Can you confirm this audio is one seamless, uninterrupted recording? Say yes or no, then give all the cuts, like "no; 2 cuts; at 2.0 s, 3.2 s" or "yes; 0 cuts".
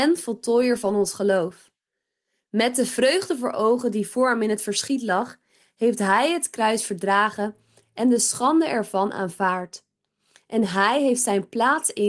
yes; 0 cuts